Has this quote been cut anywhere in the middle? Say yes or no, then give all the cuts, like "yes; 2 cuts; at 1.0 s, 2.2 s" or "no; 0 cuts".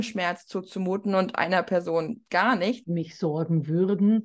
yes; 1 cut; at 2.8 s